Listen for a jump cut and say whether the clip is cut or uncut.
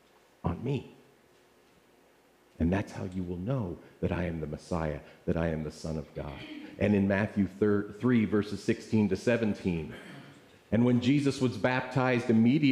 uncut